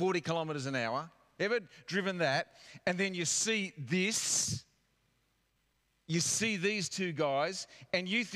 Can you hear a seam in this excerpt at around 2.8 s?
no; 1 cut; at 1.4 s

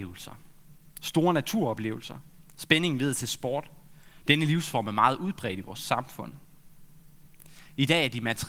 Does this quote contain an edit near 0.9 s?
no; 1 cut; at 4.2 s

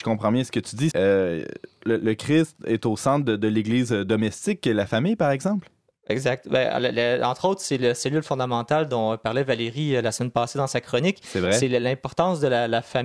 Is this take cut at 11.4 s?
no; 1 cut; at 0.9 s

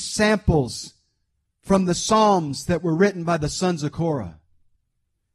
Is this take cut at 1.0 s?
no; 0 cuts

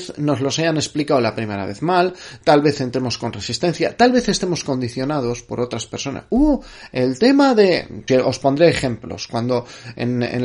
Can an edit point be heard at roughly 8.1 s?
yes; 1 cut; at 8.1 s

